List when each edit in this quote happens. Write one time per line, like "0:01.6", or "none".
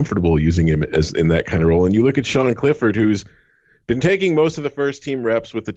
none